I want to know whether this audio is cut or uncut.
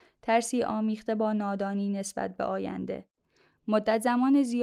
uncut